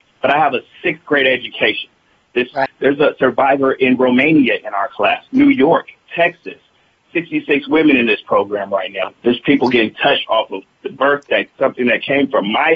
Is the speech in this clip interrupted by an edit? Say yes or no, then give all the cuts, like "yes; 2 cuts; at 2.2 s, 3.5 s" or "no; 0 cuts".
yes; 3 cuts; at 2.7 s, 5.3 s, 9.1 s